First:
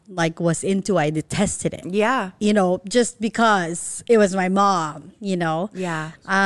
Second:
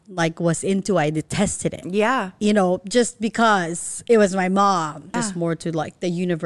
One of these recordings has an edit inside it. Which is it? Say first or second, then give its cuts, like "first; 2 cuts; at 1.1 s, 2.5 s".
second; 1 cut; at 5.1 s